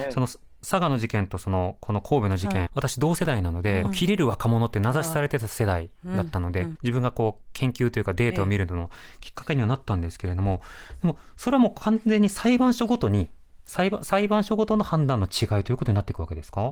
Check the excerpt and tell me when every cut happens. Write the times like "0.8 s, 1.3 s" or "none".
2.7 s, 3.8 s, 6.8 s